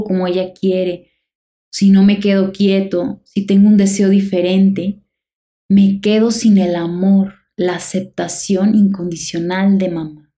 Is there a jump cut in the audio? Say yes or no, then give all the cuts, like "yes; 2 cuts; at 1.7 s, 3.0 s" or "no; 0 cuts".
no; 0 cuts